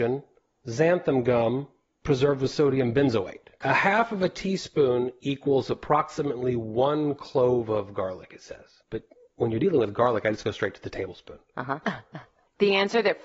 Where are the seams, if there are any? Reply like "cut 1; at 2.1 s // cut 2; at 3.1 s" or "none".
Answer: cut 1; at 3.6 s // cut 2; at 11.8 s